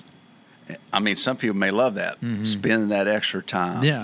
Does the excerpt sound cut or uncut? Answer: cut